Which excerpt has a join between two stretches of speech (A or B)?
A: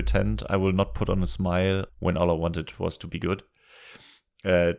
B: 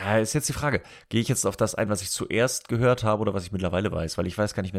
A